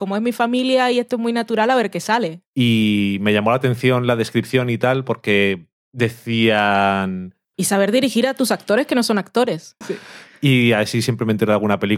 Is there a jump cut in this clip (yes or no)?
yes